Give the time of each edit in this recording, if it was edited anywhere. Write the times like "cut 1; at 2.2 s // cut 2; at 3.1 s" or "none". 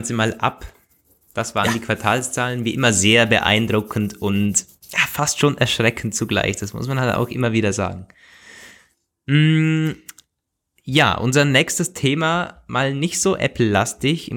none